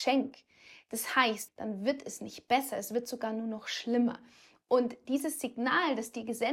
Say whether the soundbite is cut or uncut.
cut